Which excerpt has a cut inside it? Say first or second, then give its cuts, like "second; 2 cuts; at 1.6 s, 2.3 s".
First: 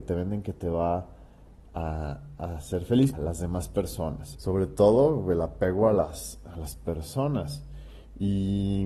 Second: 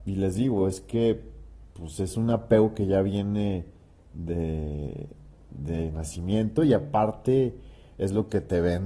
first; 2 cuts; at 3.1 s, 4.3 s